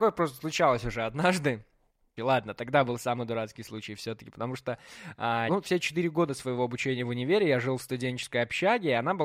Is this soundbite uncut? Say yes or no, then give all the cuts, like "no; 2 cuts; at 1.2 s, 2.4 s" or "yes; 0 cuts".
no; 2 cuts; at 2.2 s, 5.5 s